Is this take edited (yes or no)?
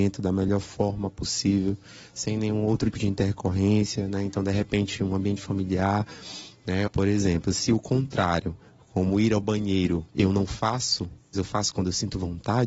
yes